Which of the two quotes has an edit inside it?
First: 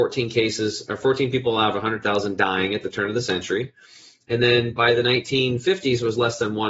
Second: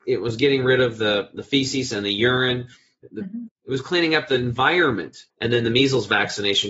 second; 2 cuts; at 3.5 s, 5.3 s

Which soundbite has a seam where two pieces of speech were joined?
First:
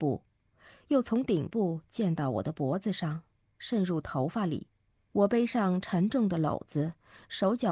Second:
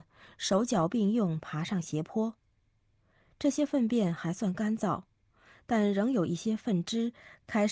first; 1 cut; at 5.0 s

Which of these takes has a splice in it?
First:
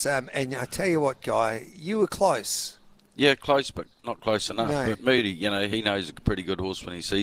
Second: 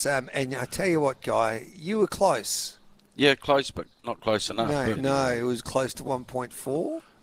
second; 2 cuts; at 4.9 s, 6.0 s

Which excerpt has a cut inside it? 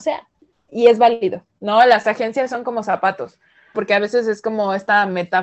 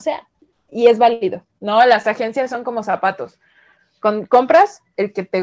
first; 1 cut; at 3.7 s

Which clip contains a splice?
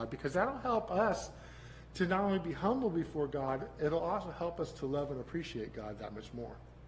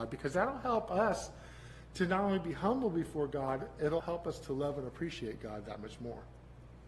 second; 1 cut; at 4.0 s

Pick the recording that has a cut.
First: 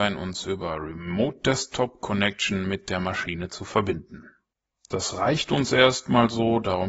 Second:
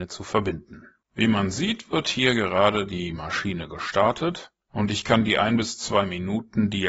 second; 2 cuts; at 1.0 s, 4.6 s

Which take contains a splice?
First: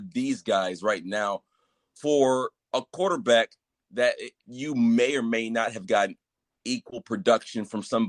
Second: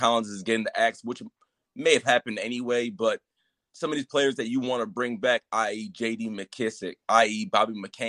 first; 1 cut; at 4.3 s

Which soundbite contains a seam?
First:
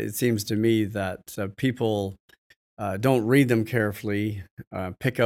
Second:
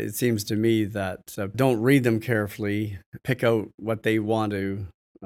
second; 2 cuts; at 1.5 s, 3.2 s

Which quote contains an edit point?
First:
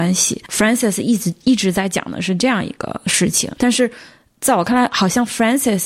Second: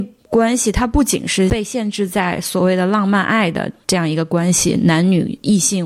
first; 1 cut; at 3.6 s

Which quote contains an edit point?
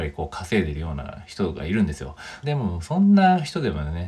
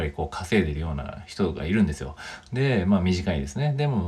first; 1 cut; at 2.4 s

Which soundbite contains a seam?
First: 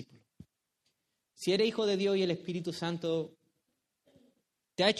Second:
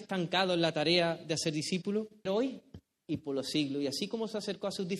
second; 1 cut; at 2.3 s

